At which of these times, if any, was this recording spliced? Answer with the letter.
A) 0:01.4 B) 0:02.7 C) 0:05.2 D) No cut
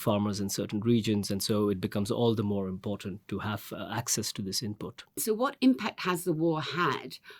C